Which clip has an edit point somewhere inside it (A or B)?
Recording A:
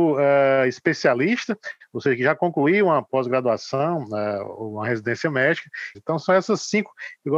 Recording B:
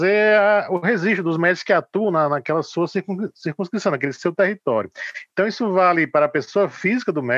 A